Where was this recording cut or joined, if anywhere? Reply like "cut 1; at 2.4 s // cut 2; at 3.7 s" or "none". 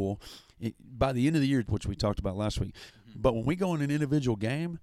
cut 1; at 1.6 s // cut 2; at 2.9 s

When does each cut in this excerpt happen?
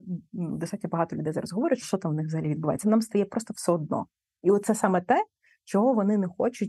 cut 1; at 1.8 s

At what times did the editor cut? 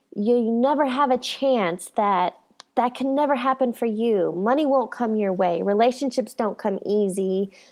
none

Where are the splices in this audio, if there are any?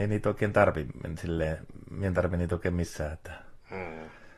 none

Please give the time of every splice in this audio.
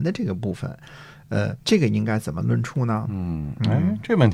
cut 1; at 1.6 s

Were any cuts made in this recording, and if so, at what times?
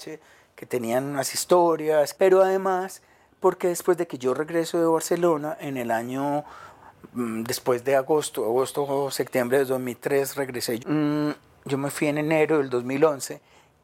cut 1; at 2.1 s // cut 2; at 10.8 s

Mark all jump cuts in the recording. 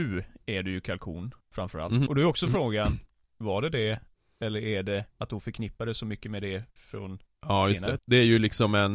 cut 1; at 2.1 s // cut 2; at 5.1 s // cut 3; at 8.0 s

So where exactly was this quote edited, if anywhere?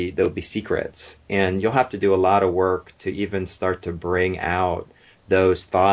none

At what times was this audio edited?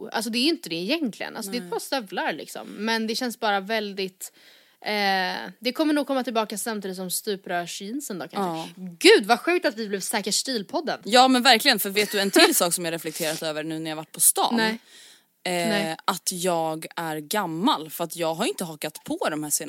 none

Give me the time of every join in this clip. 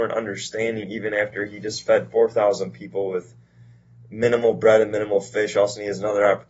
none

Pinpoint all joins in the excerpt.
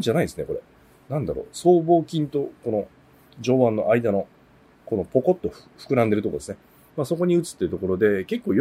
none

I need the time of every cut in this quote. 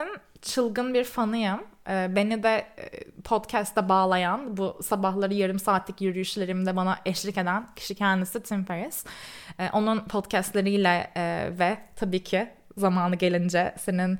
none

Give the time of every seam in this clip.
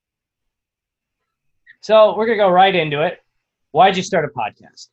cut 1; at 1.8 s

